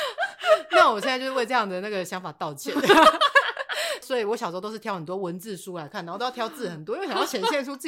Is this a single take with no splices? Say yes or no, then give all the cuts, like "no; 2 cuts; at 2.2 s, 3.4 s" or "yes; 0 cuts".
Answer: yes; 0 cuts